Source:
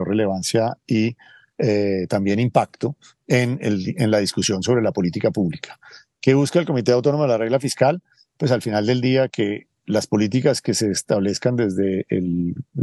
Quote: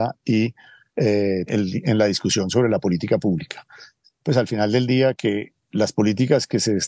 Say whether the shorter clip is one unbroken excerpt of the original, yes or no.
no